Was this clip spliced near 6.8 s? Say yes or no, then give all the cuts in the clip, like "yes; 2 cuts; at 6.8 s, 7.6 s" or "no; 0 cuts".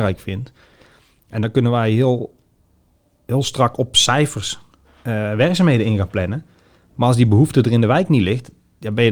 no; 0 cuts